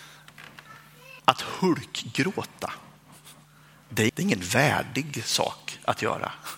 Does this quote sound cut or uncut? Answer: cut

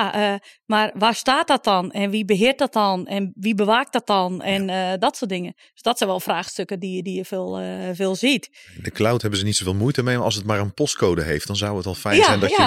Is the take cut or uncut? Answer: uncut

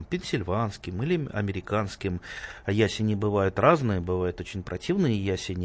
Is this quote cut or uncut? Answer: cut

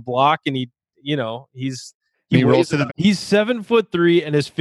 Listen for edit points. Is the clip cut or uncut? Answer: cut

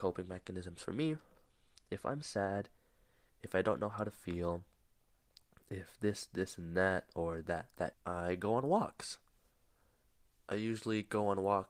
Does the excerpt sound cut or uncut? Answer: cut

